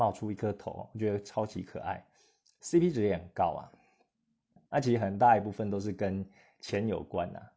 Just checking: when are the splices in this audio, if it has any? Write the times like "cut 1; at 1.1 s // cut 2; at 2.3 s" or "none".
cut 1; at 4.7 s